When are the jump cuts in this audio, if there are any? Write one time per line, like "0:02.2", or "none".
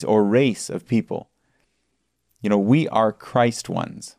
none